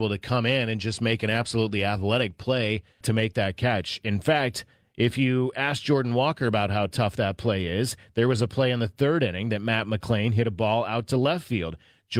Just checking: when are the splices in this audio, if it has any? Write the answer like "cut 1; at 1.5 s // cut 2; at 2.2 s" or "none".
cut 1; at 3.0 s